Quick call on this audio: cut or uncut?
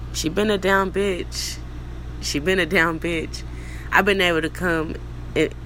uncut